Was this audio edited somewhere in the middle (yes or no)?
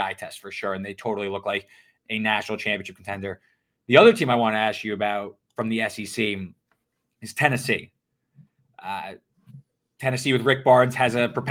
no